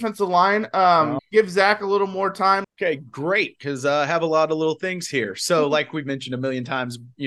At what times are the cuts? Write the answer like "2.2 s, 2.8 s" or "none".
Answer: 1.2 s, 2.6 s